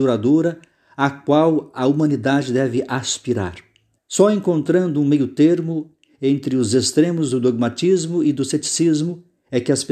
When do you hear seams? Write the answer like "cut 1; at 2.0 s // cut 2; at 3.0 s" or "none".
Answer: cut 1; at 4.0 s